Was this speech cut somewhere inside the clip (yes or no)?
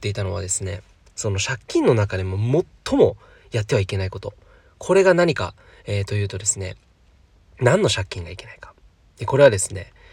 no